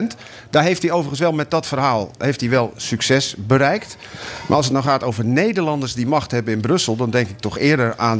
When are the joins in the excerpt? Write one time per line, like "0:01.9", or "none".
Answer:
none